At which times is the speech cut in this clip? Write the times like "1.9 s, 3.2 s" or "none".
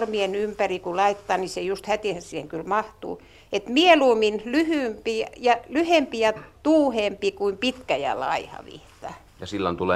none